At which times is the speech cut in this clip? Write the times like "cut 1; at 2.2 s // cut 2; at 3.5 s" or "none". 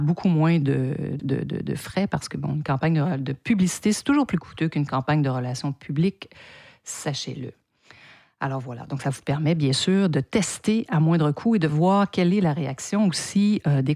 cut 1; at 1.2 s